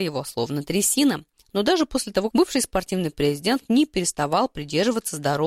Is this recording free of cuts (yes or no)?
no